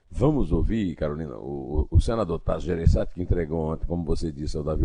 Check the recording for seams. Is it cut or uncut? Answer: uncut